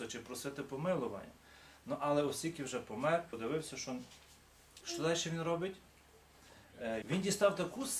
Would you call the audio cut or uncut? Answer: cut